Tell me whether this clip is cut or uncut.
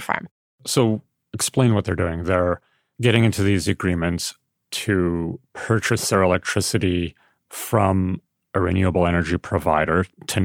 uncut